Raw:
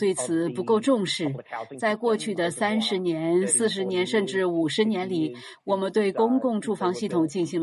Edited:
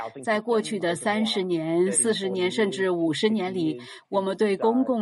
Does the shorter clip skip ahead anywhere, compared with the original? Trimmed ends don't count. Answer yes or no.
no